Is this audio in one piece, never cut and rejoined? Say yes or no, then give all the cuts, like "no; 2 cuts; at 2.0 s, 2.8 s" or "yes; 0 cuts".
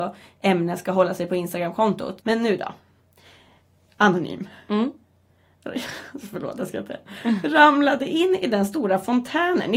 no; 1 cut; at 2.2 s